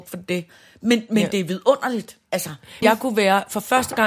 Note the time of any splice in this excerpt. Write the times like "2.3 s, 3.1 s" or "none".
2.8 s